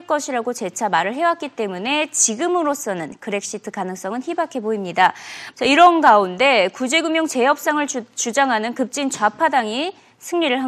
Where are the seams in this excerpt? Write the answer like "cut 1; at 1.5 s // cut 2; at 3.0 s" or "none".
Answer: cut 1; at 5.5 s

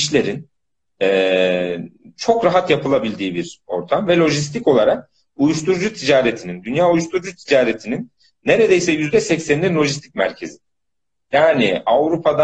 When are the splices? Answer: none

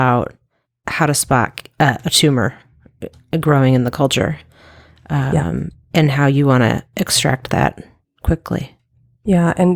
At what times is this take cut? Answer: none

